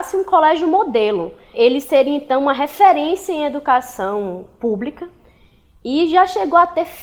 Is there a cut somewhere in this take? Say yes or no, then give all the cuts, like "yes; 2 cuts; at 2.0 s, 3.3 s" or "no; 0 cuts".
no; 0 cuts